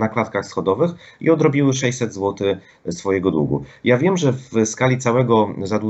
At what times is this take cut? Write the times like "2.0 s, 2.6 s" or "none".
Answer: none